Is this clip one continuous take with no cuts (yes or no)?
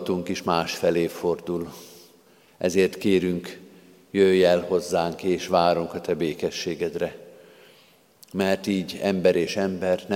yes